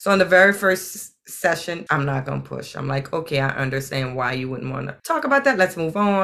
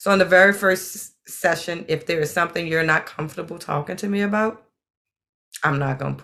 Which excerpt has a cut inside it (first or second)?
first